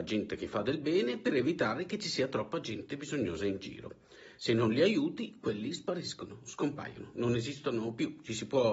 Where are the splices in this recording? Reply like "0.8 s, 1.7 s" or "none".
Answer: none

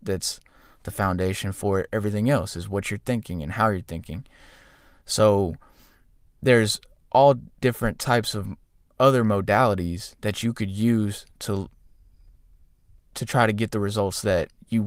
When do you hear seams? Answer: none

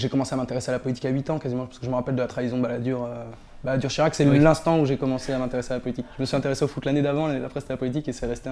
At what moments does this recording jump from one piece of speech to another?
none

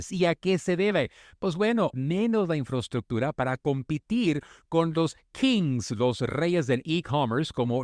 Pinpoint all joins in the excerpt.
1.9 s

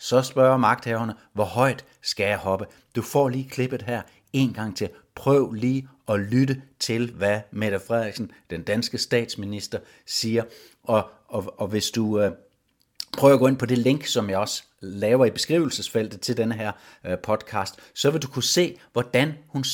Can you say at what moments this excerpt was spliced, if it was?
none

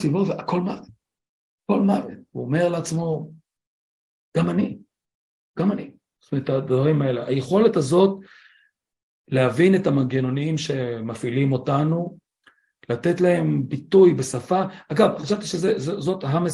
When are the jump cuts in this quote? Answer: none

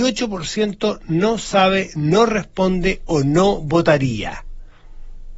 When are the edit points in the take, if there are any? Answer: none

